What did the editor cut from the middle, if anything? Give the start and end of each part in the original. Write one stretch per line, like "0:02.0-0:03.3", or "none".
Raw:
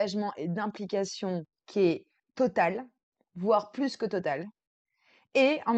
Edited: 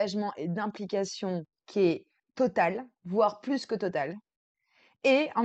0:02.9-0:03.2